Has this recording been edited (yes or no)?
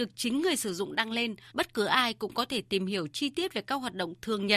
yes